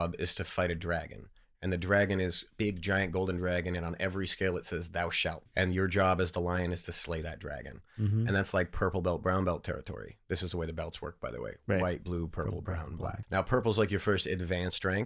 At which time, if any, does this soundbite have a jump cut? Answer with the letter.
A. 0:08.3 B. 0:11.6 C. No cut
C